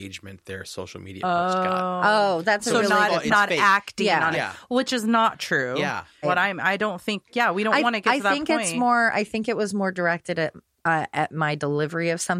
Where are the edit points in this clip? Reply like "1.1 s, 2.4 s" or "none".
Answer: 6.2 s